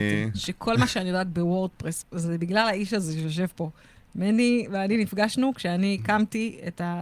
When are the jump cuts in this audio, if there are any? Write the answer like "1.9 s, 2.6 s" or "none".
2.0 s